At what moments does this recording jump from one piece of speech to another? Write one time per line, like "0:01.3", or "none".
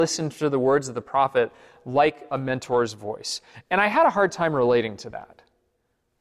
none